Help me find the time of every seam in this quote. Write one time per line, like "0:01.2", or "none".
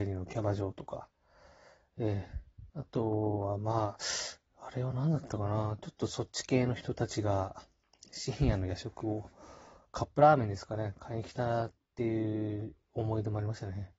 0:02.7